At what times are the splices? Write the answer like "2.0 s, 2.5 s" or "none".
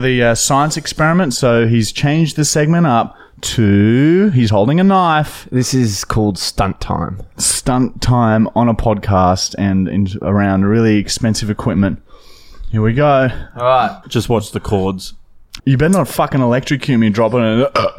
14.0 s, 15.6 s